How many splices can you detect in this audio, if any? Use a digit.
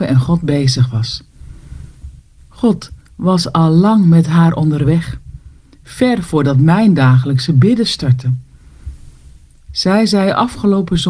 1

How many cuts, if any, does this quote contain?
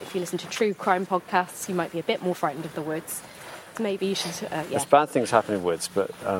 1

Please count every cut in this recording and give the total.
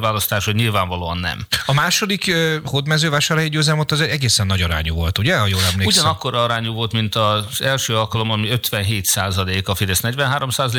0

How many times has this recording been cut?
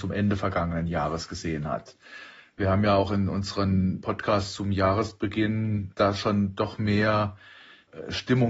0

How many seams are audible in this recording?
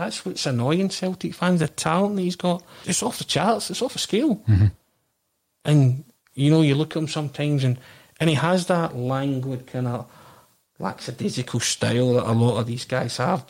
1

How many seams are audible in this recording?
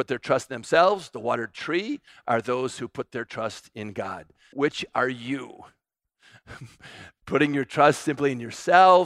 1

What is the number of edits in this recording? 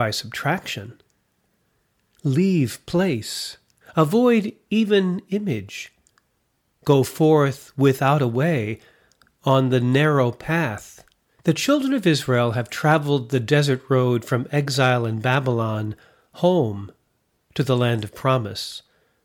2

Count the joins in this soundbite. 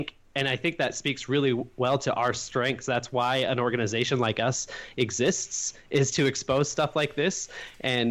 0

